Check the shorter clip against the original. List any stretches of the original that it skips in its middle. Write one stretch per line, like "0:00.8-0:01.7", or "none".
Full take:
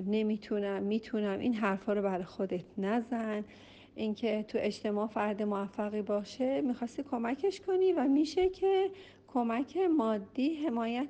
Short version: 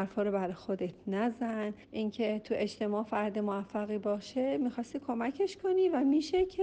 0:03.5-0:03.9